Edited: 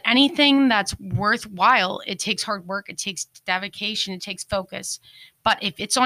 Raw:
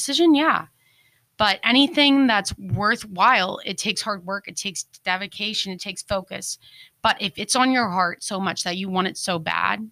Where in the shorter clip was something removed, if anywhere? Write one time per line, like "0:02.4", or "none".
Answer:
none

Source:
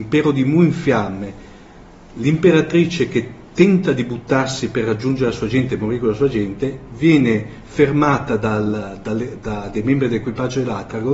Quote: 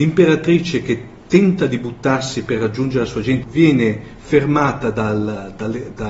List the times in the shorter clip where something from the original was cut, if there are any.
0:03.4

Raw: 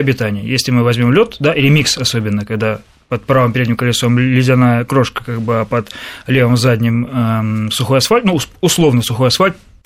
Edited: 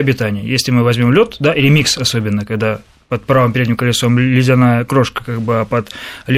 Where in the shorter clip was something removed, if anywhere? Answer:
none

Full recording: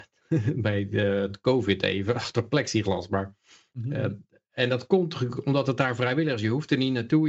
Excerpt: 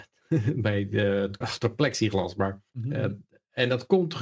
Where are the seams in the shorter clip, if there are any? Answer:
0:01.4
0:02.7

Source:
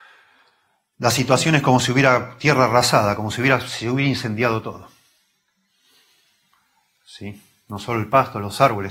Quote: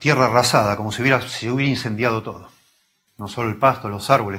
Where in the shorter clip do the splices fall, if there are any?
0:03.1

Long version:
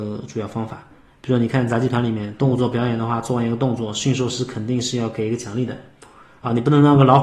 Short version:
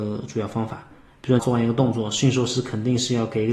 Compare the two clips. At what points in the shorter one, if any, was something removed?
0:01.4

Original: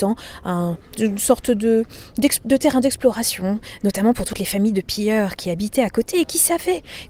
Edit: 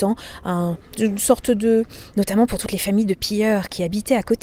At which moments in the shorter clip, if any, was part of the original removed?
0:02.1

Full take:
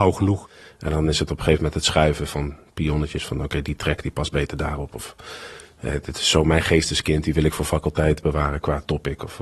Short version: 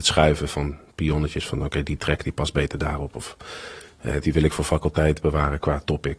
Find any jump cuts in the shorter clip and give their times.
0:04.2

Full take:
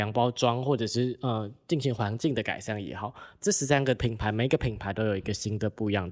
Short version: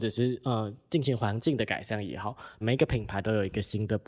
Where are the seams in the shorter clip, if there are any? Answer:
0:02.6

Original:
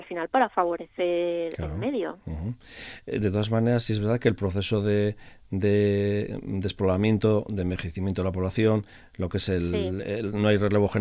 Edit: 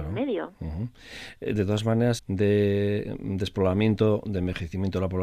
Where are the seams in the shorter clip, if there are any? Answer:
0:02.2

